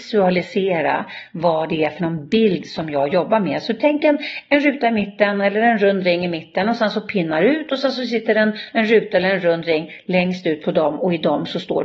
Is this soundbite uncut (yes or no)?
yes